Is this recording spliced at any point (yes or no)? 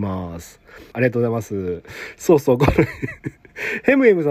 yes